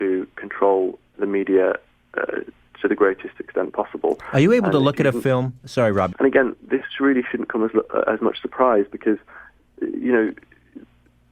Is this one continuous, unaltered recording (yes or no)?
no